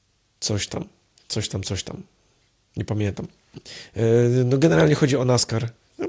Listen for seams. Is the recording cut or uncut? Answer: uncut